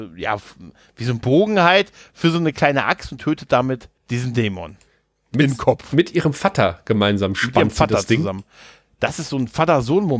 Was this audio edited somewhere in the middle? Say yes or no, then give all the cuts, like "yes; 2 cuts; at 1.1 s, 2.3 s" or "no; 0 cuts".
yes; 1 cut; at 4.0 s